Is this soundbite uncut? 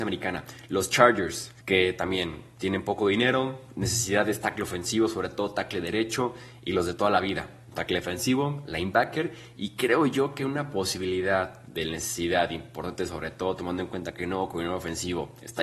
no; 1 cut; at 1.6 s

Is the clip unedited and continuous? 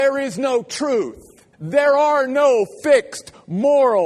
no; 1 cut; at 1.5 s

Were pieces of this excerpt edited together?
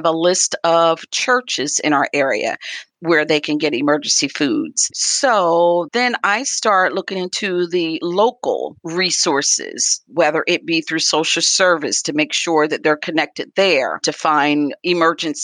yes; 2 cuts; at 4.9 s, 10.1 s

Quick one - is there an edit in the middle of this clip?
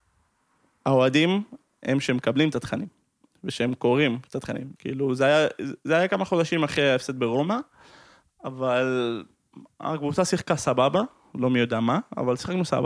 yes; 1 cut; at 4.7 s

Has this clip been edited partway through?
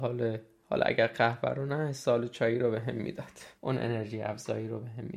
yes; 1 cut; at 3.6 s

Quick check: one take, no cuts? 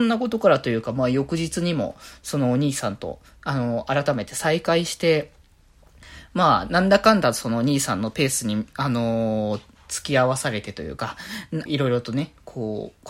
no; 1 cut; at 11.7 s

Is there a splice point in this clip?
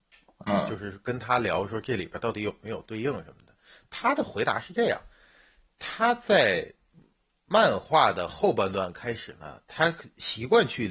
no; 0 cuts

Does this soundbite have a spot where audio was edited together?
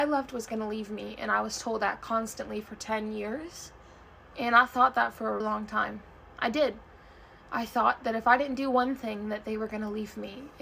yes; 2 cuts; at 4.3 s, 5.4 s

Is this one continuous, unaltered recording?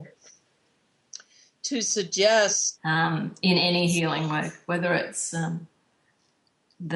no; 1 cut; at 2.8 s

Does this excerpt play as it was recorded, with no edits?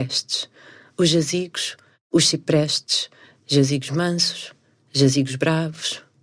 yes; 0 cuts

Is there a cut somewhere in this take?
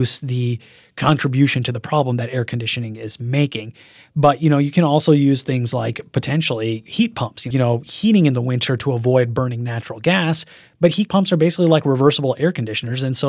yes; 1 cut; at 7.5 s

